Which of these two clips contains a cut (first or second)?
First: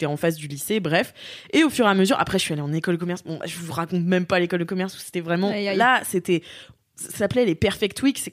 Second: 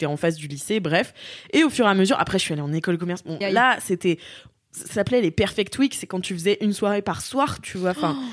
second